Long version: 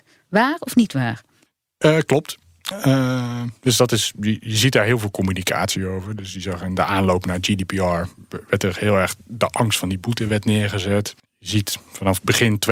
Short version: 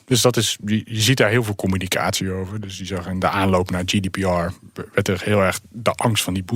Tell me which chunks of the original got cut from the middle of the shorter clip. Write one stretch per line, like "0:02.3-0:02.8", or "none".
none